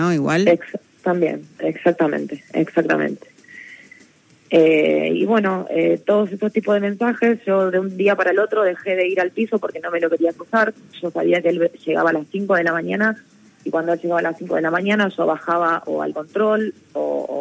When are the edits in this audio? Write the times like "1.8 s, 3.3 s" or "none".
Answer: none